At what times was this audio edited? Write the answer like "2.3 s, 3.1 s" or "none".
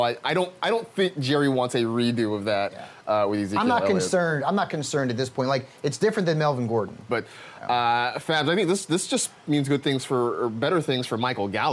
7.1 s